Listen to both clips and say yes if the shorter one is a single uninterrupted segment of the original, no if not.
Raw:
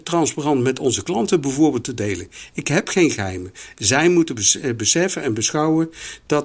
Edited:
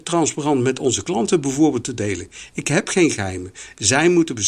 yes